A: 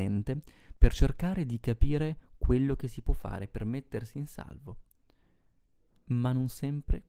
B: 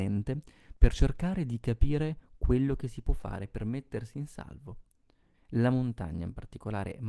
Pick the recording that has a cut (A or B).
B